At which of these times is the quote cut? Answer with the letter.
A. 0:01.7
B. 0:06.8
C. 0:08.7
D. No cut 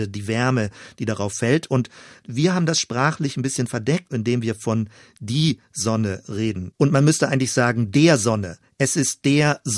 B